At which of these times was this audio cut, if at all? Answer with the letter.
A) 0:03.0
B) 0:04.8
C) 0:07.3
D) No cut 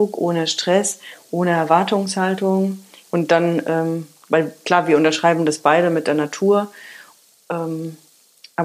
A